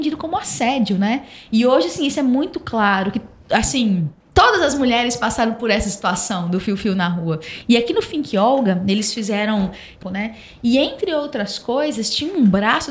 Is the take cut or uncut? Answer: cut